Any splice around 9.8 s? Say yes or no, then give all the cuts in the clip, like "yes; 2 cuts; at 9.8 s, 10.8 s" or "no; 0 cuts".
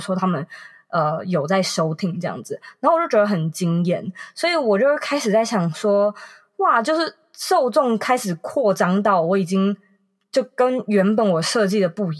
no; 0 cuts